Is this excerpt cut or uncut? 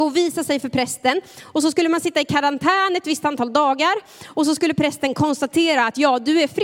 uncut